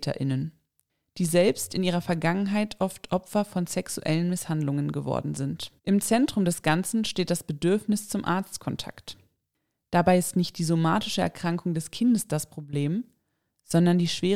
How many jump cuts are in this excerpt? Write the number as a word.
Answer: one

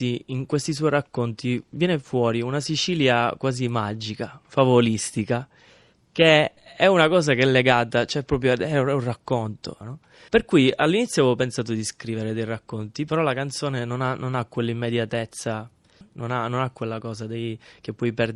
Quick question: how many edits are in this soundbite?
two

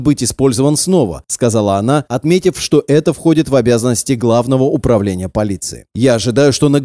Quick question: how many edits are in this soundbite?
two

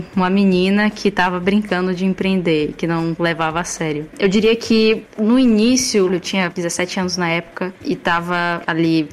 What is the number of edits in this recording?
two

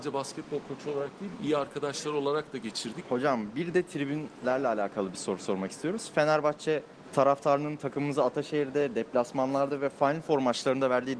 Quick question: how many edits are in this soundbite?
one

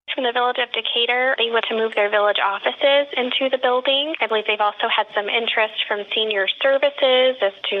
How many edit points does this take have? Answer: one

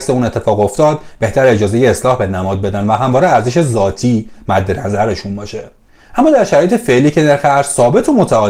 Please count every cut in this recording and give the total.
zero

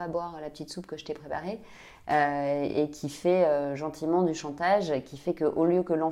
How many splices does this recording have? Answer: zero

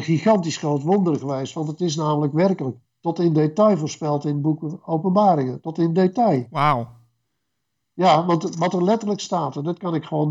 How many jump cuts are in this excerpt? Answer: zero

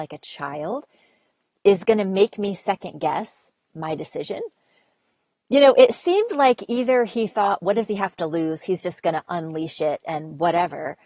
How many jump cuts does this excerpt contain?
zero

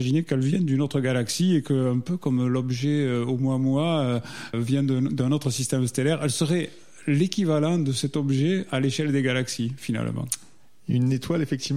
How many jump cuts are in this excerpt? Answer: one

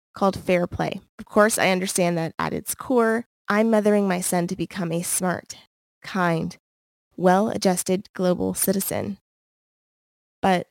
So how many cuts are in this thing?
one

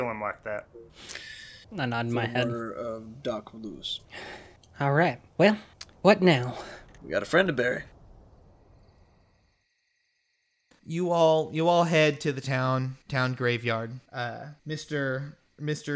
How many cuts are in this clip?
one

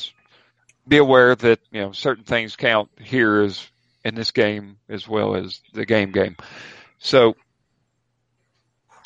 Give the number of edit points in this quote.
one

